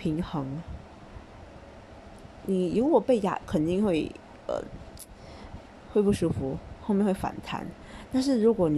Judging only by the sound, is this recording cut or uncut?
cut